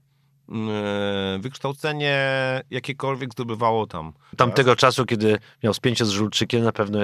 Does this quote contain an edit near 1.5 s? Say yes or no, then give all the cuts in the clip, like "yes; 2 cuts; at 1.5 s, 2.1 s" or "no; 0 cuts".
no; 1 cut; at 4.3 s